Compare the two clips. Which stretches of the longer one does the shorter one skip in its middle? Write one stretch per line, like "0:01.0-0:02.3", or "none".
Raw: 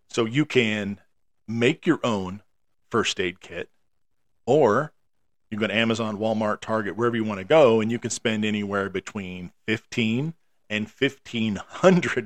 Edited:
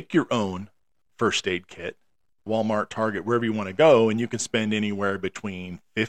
0:04.2-0:06.2